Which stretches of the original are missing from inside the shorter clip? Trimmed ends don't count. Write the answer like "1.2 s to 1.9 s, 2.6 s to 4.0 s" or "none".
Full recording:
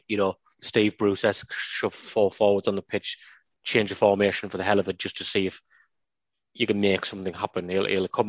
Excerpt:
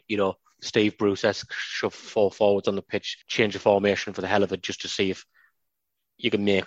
3.2 s to 3.6 s